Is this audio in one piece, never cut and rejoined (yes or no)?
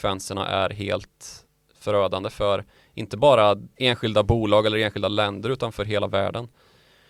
yes